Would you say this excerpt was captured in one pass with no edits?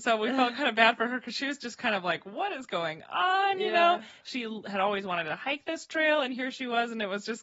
yes; 0 cuts

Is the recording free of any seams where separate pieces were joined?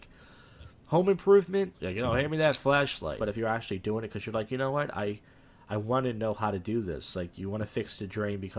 no; 2 cuts; at 1.7 s, 3.2 s

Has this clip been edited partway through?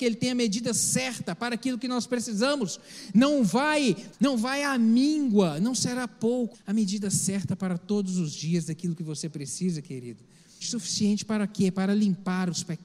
yes; 3 cuts; at 4.1 s, 6.5 s, 10.6 s

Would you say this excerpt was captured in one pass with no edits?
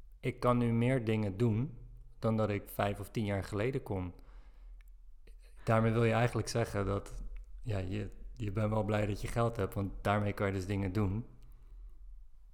no; 2 cuts; at 2.6 s, 5.6 s

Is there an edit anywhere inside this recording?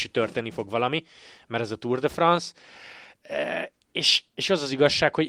no; 0 cuts

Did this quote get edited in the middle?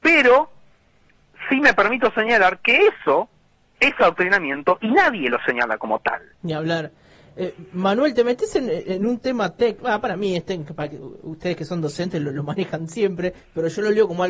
no; 0 cuts

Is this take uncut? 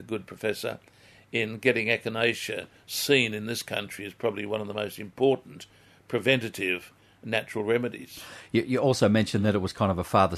yes; 0 cuts

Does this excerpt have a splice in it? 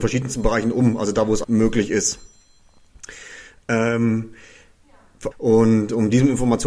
yes; 2 cuts; at 1.4 s, 5.3 s

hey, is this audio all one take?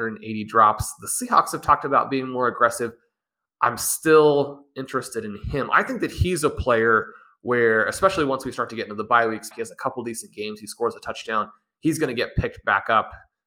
no; 1 cut; at 9.5 s

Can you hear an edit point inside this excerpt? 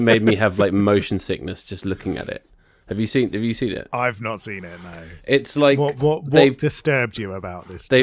no; 0 cuts

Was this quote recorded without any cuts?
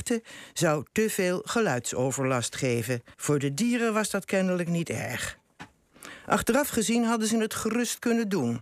no; 1 cut; at 3.1 s

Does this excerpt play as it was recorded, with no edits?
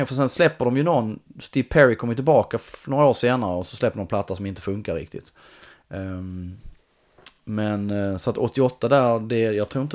yes; 0 cuts

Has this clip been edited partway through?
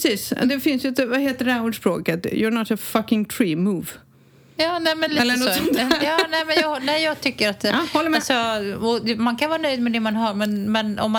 no; 0 cuts

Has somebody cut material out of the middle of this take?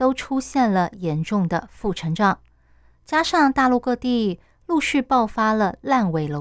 no; 0 cuts

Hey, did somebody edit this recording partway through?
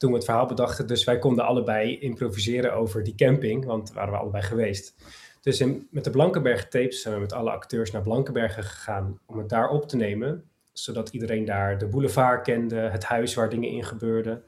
no; 0 cuts

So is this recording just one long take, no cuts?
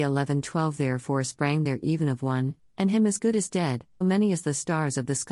no; 1 cut; at 4.0 s

